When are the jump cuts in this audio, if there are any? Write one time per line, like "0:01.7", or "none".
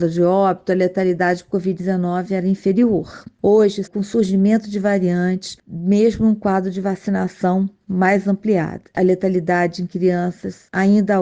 0:03.9